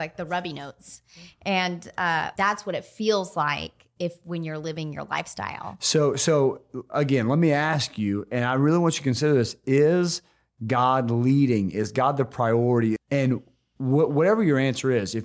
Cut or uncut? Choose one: cut